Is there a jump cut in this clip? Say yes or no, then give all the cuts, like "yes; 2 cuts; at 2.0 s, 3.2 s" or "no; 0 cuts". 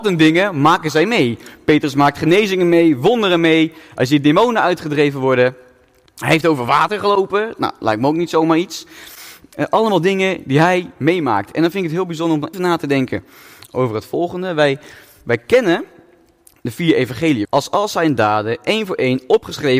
yes; 2 cuts; at 12.5 s, 17.4 s